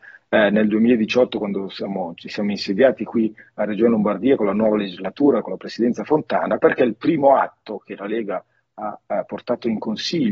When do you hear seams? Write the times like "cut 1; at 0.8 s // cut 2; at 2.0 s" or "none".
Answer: none

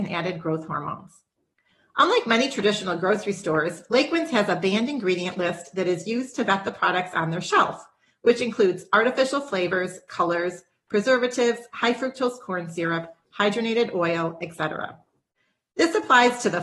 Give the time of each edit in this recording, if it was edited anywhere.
none

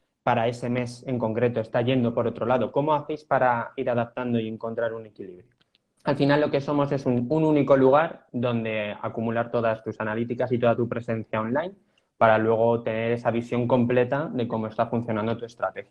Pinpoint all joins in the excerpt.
cut 1; at 6.0 s

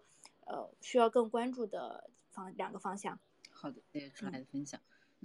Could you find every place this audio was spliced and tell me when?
none

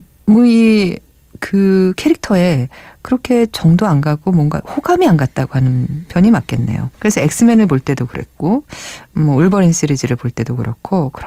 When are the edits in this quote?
cut 1; at 6.9 s

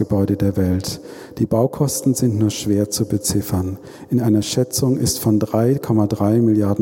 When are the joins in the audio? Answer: none

